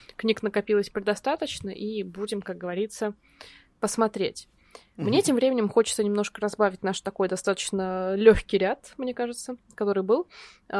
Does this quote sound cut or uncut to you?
uncut